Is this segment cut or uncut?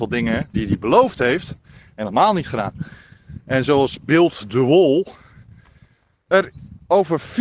cut